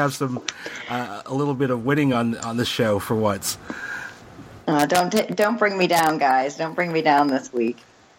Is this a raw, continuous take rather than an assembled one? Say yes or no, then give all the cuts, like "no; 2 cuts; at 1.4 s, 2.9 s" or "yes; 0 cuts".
yes; 0 cuts